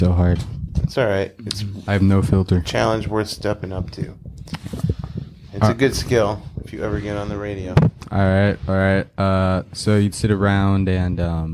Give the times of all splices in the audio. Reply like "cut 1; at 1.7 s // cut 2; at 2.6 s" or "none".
none